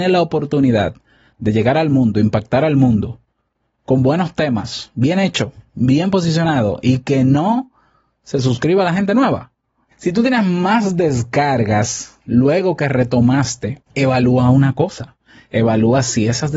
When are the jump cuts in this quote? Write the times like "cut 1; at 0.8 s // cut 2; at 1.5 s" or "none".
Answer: cut 1; at 9.9 s // cut 2; at 13.9 s